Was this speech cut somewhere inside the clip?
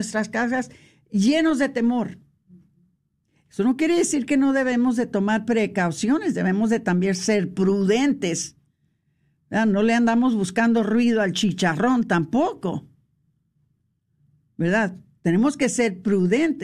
no; 0 cuts

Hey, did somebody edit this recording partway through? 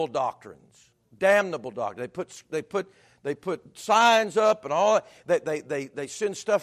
no; 0 cuts

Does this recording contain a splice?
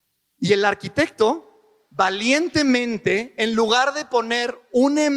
no; 0 cuts

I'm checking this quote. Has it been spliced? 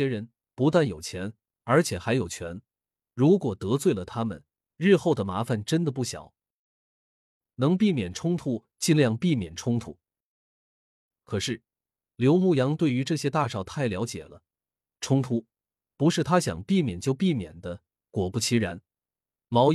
no; 0 cuts

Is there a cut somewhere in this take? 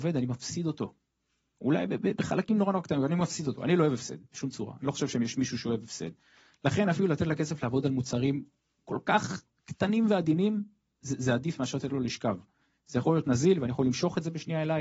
no; 0 cuts

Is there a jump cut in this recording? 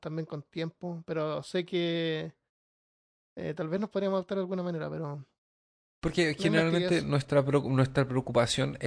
no; 0 cuts

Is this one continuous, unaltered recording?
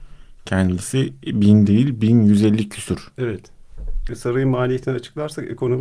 no; 1 cut; at 4.1 s

